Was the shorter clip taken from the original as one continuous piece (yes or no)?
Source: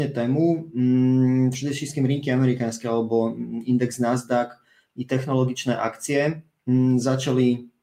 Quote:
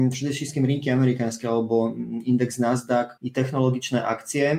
no